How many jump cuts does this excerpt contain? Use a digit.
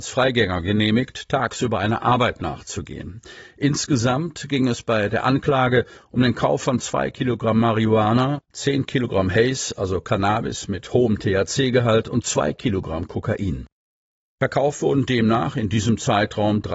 1